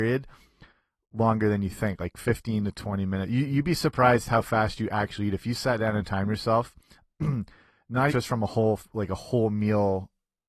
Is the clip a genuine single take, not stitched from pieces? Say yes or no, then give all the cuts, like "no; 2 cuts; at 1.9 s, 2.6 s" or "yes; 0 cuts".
no; 1 cut; at 8.1 s